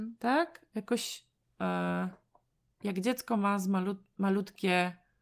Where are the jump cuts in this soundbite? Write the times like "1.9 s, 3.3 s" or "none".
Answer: 1.4 s